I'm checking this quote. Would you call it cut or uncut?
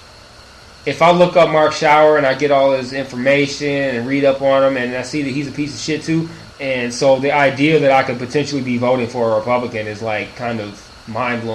cut